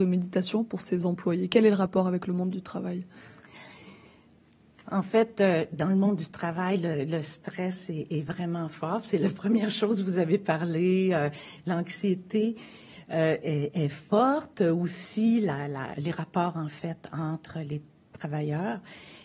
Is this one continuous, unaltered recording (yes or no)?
no